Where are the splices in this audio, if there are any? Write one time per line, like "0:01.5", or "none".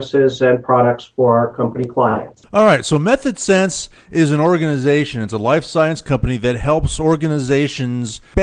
none